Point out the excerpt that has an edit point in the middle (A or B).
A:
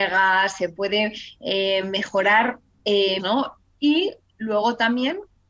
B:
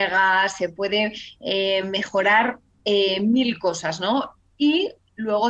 A